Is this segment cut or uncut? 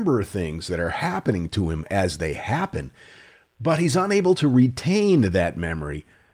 uncut